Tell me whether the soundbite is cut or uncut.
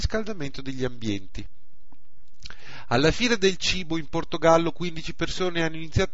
uncut